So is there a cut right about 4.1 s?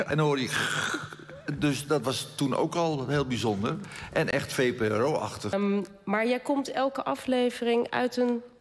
no; 1 cut; at 5.5 s

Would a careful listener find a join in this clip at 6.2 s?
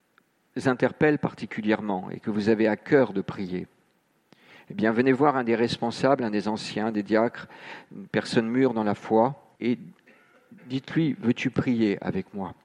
no; 1 cut; at 9.6 s

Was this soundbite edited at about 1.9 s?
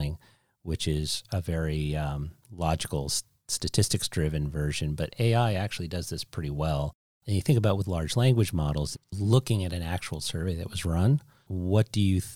no; 1 cut; at 8.9 s

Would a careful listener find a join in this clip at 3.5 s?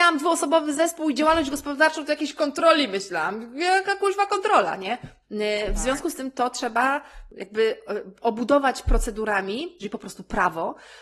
no; 2 cuts; at 5.2 s, 9.8 s

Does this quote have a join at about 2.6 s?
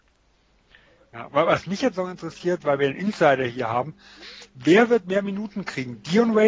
no; 0 cuts

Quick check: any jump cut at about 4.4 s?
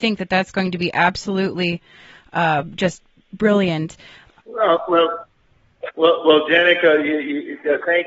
yes; 2 cuts; at 4.4 s, 5.9 s

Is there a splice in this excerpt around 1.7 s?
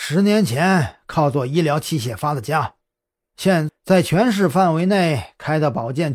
no; 1 cut; at 3.7 s

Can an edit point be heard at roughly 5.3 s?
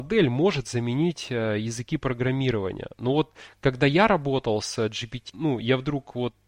yes; 1 cut; at 5.3 s

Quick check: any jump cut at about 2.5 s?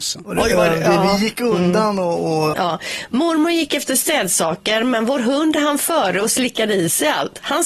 yes; 1 cut; at 2.5 s

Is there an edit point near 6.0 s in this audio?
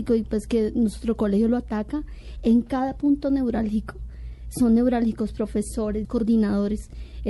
yes; 1 cut; at 6.0 s

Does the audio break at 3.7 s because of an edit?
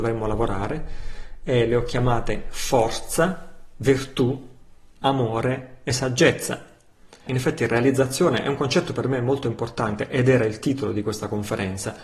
no; 1 cut; at 7.3 s

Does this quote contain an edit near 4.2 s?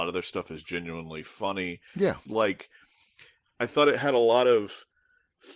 no; 1 cut; at 2.3 s

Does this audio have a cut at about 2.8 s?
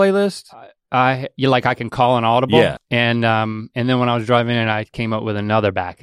yes; 1 cut; at 2.8 s

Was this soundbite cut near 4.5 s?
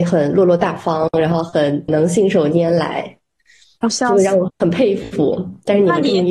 yes; 1 cut; at 4.5 s

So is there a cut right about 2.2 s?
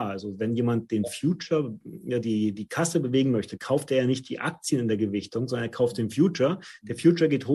yes; 1 cut; at 2.2 s

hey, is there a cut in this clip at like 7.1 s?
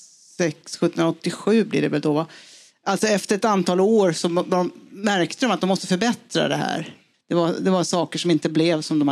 yes; 1 cut; at 7.1 s

